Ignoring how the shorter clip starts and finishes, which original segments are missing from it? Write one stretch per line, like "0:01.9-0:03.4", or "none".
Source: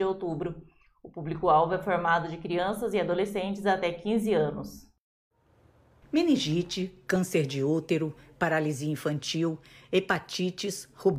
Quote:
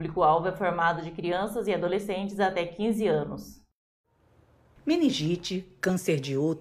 none